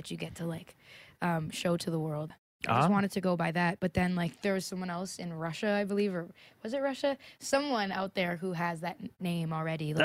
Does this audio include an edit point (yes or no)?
yes